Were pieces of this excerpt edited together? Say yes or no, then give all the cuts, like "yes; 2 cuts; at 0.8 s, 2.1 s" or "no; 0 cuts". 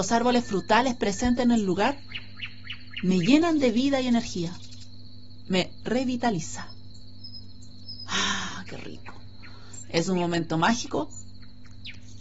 yes; 1 cut; at 9.8 s